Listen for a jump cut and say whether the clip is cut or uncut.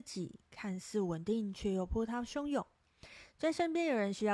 uncut